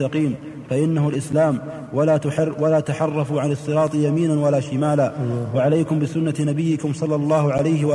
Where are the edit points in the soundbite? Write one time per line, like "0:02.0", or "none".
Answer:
0:02.5